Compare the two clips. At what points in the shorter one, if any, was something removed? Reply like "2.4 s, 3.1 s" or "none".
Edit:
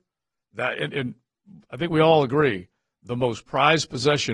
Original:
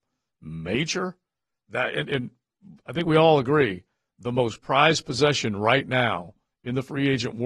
none